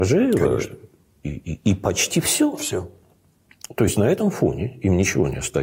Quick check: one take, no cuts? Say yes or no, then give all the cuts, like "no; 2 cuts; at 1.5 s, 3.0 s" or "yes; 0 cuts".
yes; 0 cuts